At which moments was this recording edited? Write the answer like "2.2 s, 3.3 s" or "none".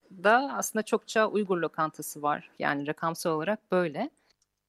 2.6 s